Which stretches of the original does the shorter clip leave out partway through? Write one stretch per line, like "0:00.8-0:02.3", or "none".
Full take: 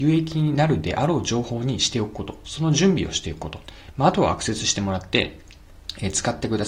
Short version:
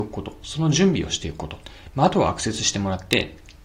none